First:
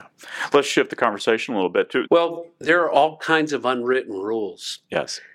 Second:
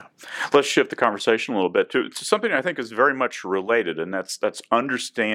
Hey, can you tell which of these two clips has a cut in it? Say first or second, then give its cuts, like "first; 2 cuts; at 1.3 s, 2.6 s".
first; 1 cut; at 2.1 s